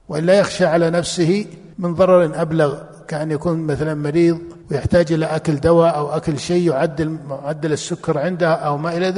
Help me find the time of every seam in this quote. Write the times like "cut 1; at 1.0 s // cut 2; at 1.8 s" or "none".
cut 1; at 1.7 s // cut 2; at 4.6 s